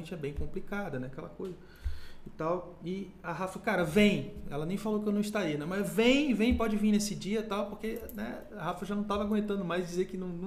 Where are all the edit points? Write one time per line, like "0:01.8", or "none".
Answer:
none